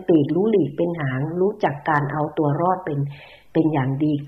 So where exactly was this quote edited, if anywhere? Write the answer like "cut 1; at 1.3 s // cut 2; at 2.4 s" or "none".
none